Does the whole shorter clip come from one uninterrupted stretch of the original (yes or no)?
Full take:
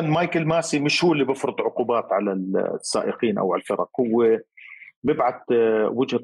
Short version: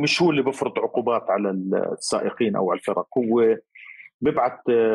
yes